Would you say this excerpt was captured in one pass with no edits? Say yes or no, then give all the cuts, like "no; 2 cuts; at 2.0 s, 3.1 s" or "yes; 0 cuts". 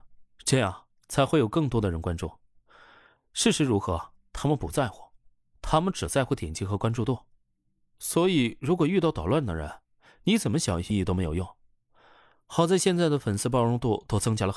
no; 1 cut; at 10.9 s